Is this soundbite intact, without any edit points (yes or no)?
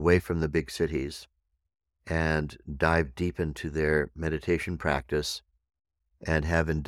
yes